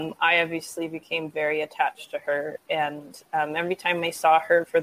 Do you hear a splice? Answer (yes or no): no